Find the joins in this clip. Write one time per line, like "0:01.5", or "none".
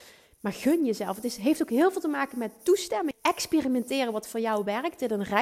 0:03.1

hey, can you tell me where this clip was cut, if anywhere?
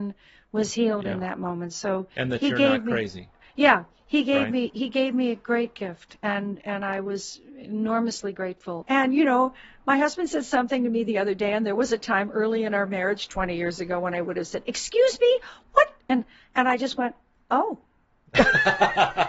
0:08.8

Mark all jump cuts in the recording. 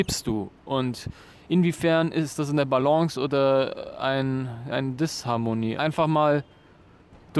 0:05.8

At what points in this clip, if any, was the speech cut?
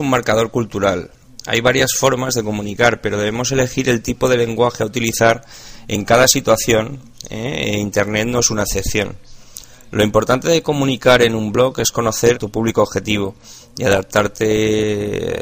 0:12.3

